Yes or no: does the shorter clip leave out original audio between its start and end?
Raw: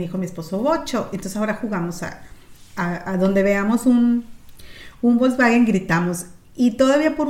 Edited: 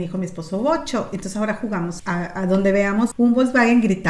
yes